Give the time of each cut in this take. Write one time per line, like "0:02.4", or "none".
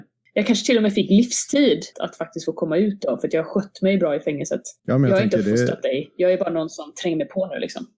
0:01.9
0:04.8